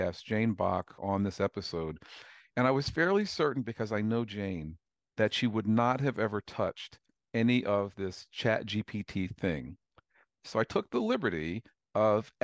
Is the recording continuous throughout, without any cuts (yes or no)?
no